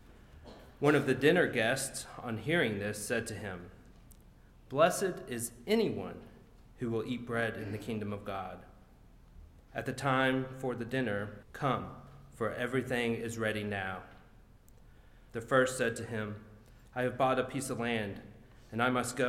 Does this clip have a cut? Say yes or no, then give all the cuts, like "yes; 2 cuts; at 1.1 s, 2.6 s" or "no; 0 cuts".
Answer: yes; 3 cuts; at 9.7 s, 11.4 s, 15.3 s